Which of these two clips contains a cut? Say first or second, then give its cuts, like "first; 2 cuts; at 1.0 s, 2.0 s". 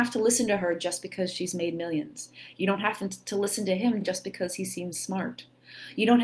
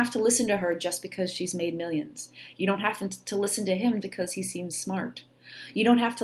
second; 1 cut; at 4.0 s